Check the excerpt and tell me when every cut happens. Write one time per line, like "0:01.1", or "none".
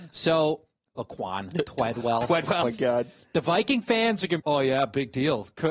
0:02.6
0:04.4